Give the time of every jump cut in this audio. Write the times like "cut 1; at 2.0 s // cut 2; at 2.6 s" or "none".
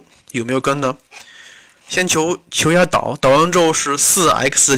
none